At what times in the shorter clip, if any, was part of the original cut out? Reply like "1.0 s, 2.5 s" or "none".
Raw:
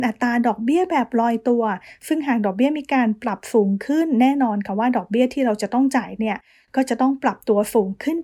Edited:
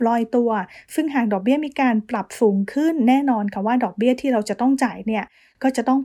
none

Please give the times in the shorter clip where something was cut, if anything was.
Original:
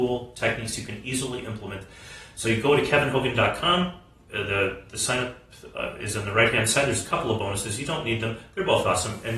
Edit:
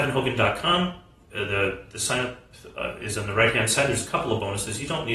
none

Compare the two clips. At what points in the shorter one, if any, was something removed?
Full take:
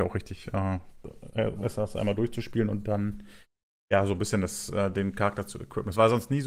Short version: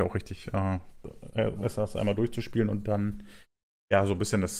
none

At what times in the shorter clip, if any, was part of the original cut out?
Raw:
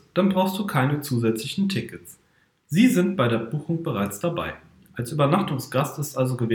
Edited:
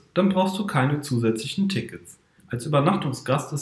2.4 s

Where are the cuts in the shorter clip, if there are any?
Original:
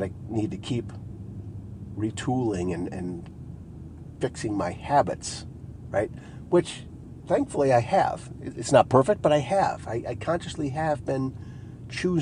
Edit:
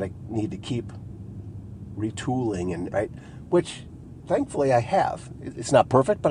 2.9 s

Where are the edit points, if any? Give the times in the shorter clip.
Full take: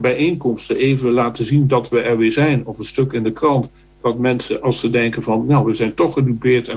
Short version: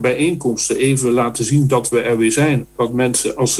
2.6 s

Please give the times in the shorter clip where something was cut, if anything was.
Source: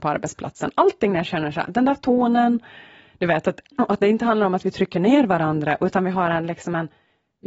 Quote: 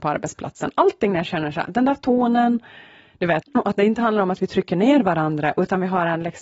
3.4 s

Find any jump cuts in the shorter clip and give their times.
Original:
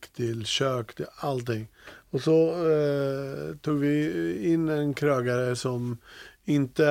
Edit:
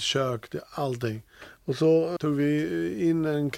2.2 s

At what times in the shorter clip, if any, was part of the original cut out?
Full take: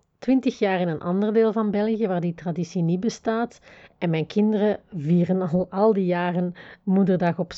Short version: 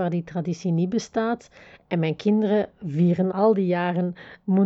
3.3 s

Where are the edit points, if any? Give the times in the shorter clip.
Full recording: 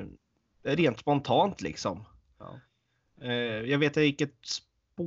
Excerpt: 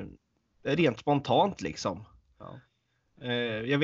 none

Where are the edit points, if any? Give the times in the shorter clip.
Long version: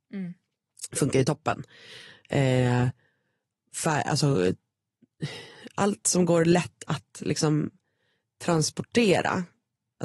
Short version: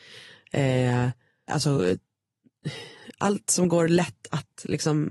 1.5 s

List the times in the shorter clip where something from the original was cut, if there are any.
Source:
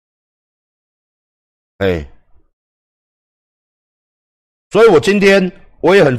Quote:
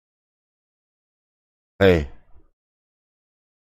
none

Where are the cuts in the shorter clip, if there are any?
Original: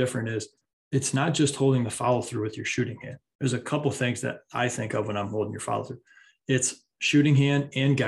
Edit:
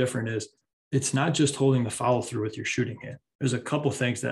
none

